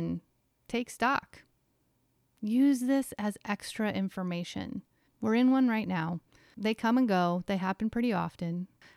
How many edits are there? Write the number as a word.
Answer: one